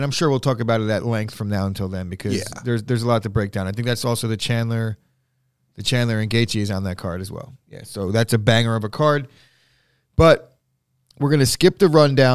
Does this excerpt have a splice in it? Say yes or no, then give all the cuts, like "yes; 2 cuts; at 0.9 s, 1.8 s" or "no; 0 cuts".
no; 0 cuts